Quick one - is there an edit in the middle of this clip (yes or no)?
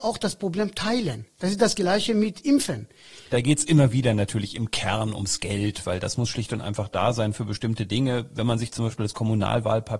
yes